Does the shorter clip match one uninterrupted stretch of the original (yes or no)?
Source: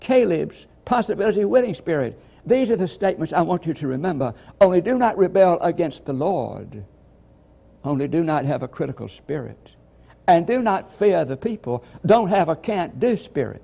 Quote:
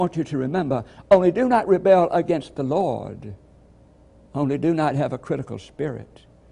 yes